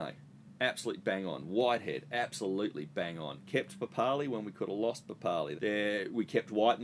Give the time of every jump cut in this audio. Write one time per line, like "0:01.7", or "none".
0:05.5